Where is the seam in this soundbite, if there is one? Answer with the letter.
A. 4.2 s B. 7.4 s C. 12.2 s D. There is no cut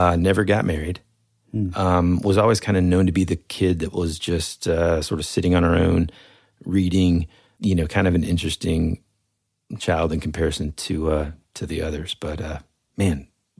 D